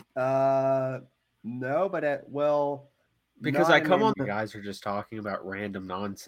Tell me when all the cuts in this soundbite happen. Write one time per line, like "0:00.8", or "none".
0:04.1